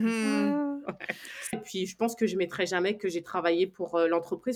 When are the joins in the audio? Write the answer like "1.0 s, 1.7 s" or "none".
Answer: 1.5 s